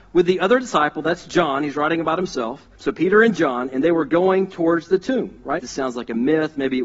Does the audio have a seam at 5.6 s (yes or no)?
yes